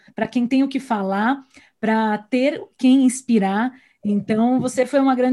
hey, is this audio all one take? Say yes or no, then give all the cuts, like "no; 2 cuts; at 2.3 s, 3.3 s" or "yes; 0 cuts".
yes; 0 cuts